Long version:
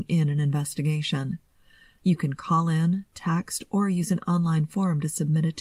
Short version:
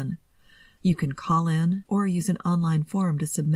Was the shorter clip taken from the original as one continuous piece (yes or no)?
no